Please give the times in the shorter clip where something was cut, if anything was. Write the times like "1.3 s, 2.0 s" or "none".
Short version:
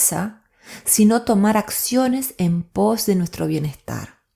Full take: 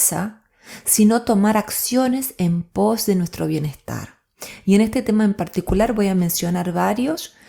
none